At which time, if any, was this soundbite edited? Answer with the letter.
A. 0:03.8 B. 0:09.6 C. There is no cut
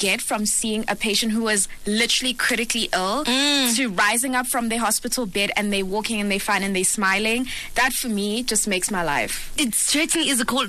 B